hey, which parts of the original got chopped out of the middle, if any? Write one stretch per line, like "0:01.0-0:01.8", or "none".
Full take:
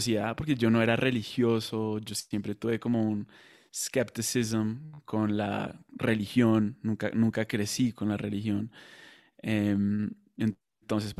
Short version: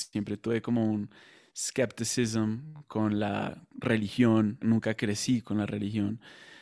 0:06.8-0:07.1